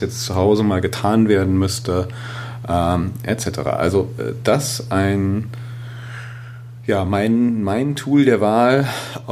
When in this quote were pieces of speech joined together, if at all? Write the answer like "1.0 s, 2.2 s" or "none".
none

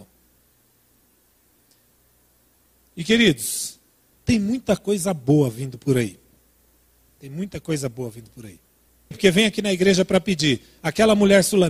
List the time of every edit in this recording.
4.1 s, 9.1 s

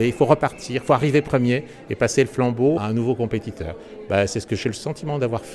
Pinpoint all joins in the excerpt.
2.8 s

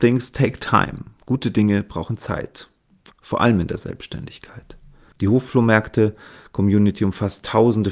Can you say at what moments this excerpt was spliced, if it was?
3.1 s, 5.1 s

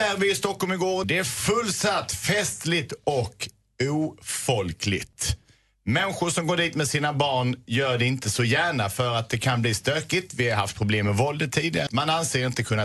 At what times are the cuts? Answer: 1.0 s, 11.9 s

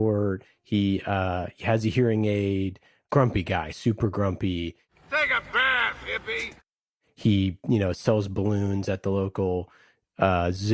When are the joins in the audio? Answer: none

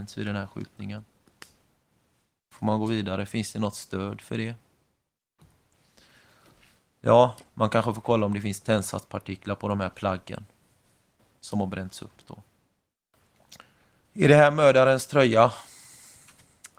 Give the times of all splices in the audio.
14.0 s

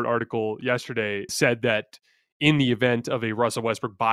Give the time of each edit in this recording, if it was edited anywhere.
1.3 s

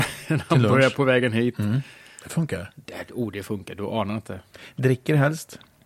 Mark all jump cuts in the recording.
none

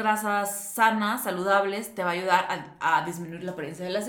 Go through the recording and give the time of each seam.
none

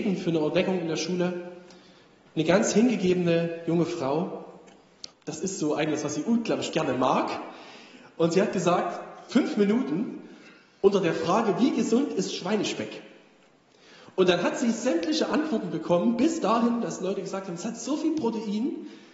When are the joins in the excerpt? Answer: 5.1 s, 9.3 s

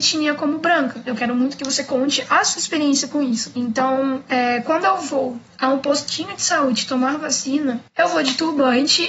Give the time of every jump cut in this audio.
1.1 s, 3.5 s

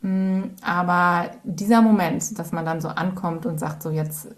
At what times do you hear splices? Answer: 2.4 s

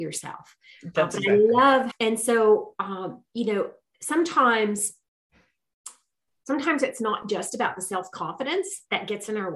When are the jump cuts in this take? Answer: 1.9 s

